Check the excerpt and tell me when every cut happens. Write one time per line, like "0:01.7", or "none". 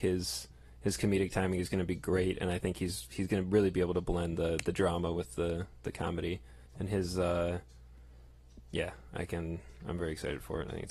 0:06.7